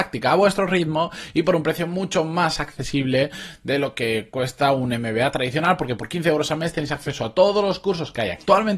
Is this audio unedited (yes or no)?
yes